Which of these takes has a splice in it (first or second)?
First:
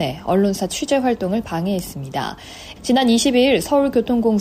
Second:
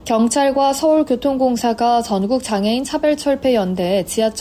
first